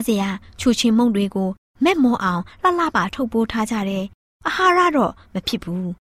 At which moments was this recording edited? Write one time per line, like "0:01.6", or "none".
0:02.9

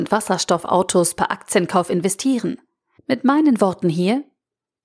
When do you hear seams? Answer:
0:03.0

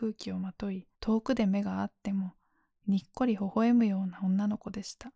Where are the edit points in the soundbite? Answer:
0:00.9

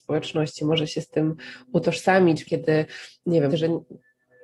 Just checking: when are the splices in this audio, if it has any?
0:02.4
0:03.5

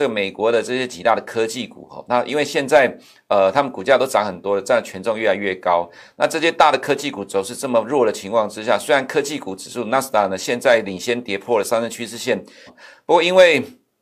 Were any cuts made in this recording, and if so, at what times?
0:12.7

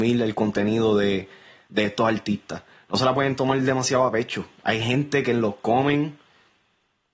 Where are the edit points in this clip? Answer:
none

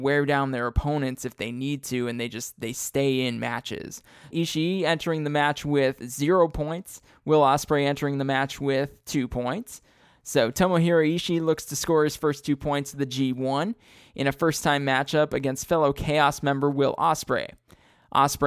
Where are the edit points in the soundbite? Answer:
0:04.3

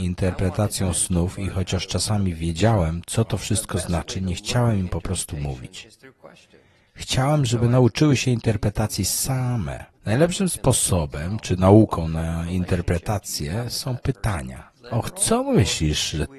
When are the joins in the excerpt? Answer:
0:09.9
0:14.7

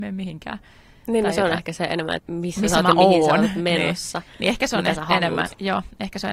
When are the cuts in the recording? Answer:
0:02.2

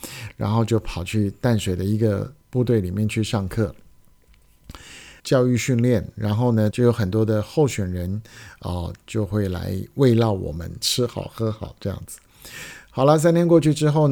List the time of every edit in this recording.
0:05.2
0:06.7
0:10.8

